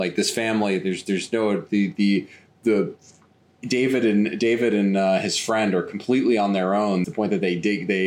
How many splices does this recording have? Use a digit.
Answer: 1